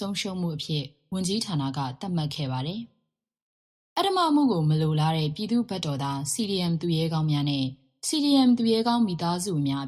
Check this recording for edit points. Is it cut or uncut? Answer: uncut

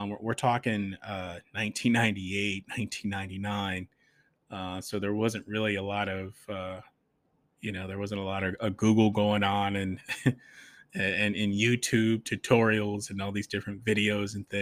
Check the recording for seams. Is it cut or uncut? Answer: uncut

